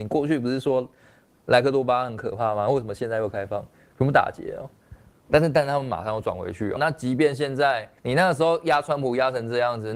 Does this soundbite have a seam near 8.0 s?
yes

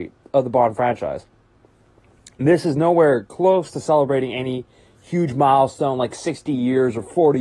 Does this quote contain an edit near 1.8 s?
no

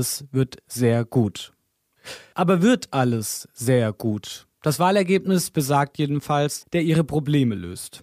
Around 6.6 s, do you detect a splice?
yes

